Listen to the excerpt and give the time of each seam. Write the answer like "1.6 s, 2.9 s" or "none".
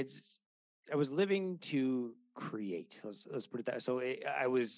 none